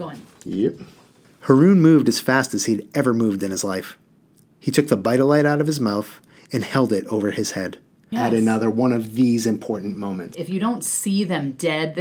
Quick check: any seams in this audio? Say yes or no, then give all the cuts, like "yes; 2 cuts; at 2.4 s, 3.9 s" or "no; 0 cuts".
yes; 2 cuts; at 8.1 s, 10.3 s